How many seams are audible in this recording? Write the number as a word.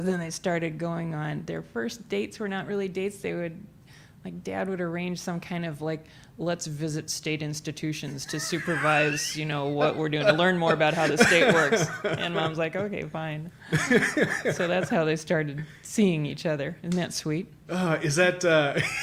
zero